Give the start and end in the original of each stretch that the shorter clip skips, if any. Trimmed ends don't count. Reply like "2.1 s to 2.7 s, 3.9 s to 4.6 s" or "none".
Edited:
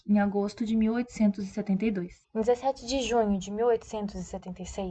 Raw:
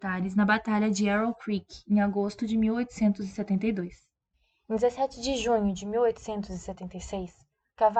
4.0 s to 4.6 s